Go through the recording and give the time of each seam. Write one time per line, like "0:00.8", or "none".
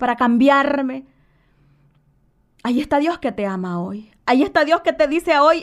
none